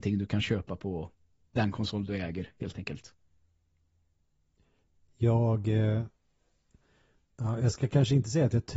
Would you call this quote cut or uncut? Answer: uncut